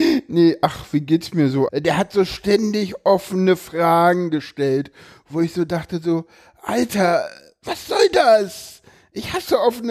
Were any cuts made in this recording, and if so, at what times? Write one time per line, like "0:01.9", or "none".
0:01.7